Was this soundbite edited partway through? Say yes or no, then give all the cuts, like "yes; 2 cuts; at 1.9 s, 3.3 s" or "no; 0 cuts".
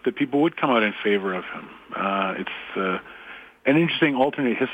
no; 0 cuts